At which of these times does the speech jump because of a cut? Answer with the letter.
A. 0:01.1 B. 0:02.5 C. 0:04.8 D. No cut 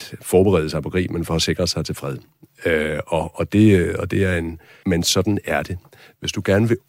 C